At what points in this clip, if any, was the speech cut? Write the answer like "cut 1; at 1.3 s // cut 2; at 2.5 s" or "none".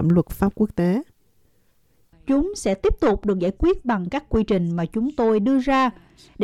cut 1; at 2.1 s